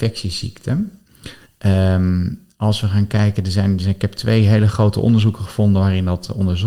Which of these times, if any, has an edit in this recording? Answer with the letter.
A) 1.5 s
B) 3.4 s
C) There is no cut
A